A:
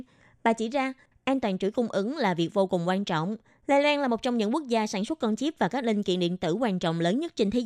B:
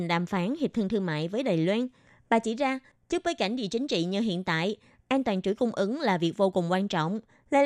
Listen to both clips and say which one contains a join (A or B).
A